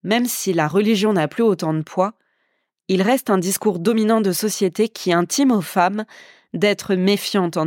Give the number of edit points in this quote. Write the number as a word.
zero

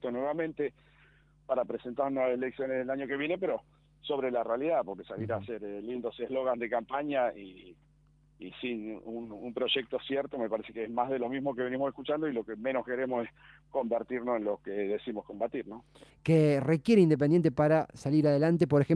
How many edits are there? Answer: one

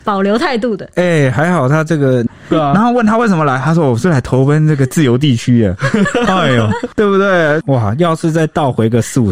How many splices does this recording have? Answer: two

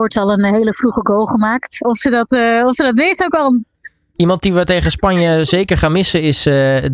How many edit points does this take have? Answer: one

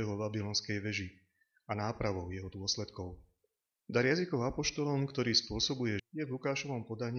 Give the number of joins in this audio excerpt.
two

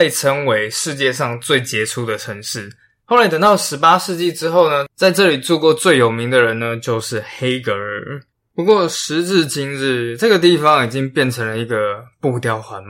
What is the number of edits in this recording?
one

